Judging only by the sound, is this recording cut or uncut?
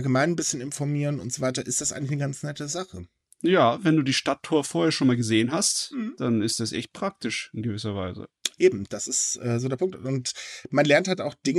uncut